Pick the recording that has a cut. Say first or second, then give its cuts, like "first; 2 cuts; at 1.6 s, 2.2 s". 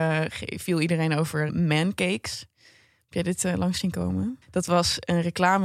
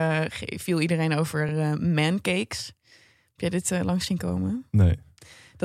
first; 2 cuts; at 1.5 s, 4.4 s